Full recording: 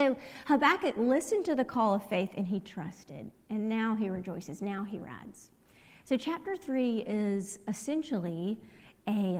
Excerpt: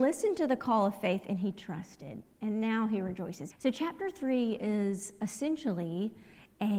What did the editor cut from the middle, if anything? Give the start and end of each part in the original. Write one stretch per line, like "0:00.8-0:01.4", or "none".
0:04.6-0:06.0